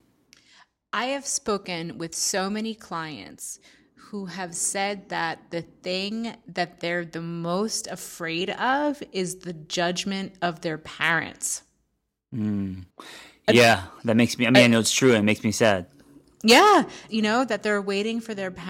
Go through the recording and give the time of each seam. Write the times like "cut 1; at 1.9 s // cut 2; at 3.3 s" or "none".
cut 1; at 12.9 s // cut 2; at 17.1 s